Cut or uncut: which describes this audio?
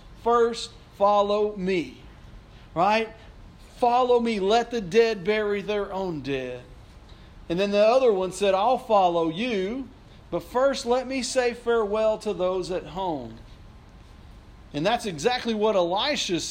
cut